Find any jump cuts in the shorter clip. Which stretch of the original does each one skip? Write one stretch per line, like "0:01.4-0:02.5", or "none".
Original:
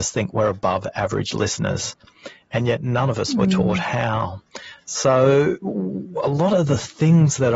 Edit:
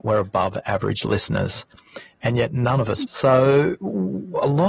0:03.3-0:04.8